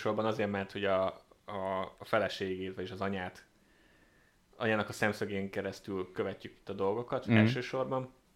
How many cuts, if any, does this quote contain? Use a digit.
0